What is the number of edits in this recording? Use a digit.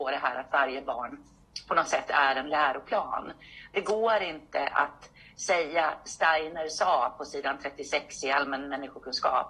0